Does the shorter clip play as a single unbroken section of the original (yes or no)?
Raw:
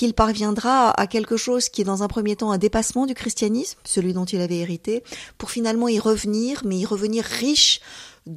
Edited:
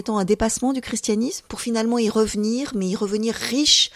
no